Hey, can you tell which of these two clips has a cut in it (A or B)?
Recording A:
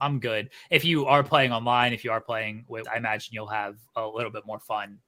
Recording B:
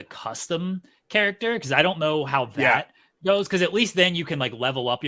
A